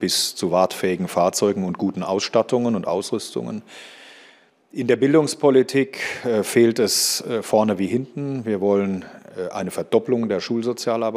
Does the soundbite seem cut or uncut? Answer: uncut